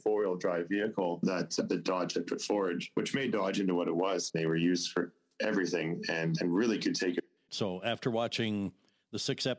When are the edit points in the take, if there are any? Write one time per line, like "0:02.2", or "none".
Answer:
0:04.3
0:07.5